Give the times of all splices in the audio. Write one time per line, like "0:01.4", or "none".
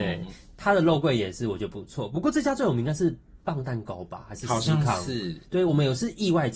none